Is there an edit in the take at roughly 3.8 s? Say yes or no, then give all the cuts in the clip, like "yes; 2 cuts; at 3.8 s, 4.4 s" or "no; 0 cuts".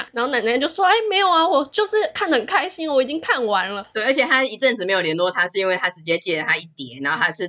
yes; 1 cut; at 3.8 s